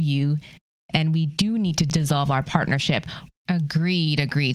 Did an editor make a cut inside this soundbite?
yes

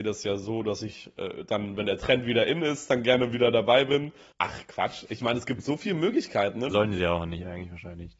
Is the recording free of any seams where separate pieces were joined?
no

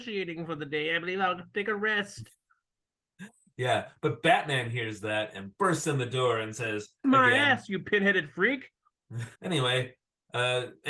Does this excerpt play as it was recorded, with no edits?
no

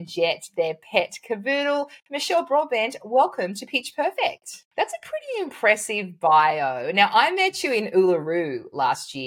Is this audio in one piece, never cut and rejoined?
no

